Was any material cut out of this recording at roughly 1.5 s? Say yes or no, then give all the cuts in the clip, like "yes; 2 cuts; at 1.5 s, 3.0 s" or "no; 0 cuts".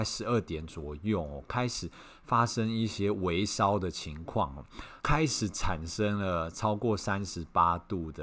no; 1 cut; at 5.0 s